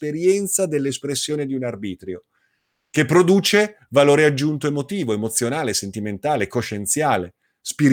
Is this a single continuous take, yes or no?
yes